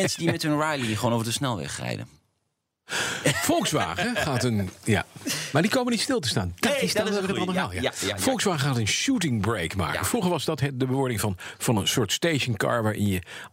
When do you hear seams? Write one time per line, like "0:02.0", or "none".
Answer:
none